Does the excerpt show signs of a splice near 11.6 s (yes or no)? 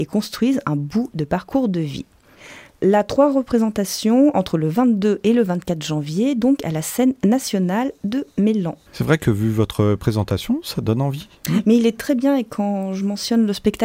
no